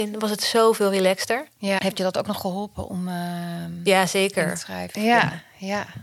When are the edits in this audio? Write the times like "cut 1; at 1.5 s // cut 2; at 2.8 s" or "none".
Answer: cut 1; at 1.8 s // cut 2; at 4.9 s